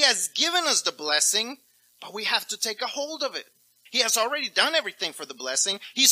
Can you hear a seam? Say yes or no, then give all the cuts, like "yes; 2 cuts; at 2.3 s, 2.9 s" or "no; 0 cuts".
yes; 1 cut; at 3.9 s